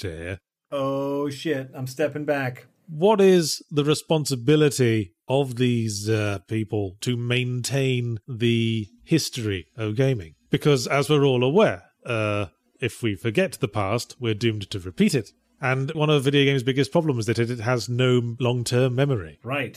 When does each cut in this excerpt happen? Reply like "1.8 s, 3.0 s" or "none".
none

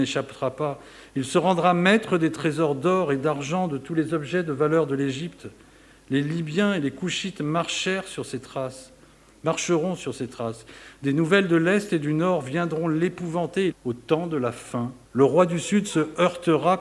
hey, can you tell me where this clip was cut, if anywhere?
13.7 s, 15.0 s

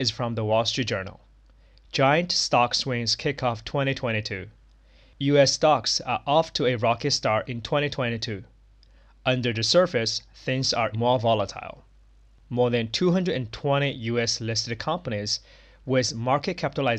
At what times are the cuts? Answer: 10.9 s

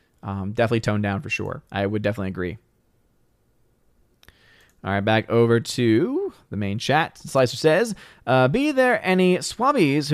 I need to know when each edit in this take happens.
1.7 s

